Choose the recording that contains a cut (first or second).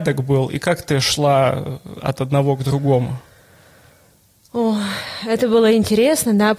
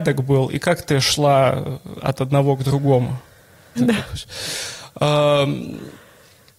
second